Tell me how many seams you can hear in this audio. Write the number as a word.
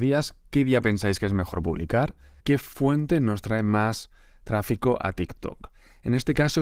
one